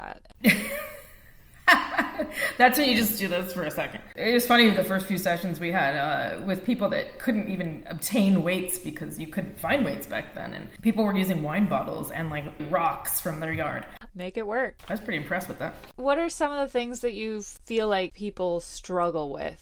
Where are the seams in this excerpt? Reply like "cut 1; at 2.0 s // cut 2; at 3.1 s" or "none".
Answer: cut 1; at 12.6 s // cut 2; at 14.1 s